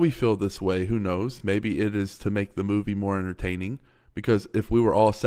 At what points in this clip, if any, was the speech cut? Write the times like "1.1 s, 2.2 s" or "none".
none